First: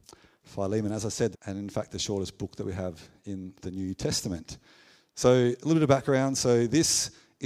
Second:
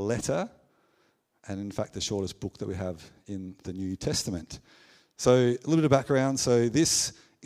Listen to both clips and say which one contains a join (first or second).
first